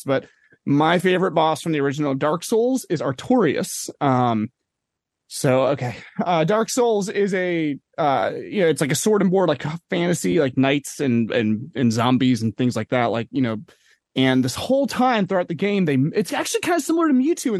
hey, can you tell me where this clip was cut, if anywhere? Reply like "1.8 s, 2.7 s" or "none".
none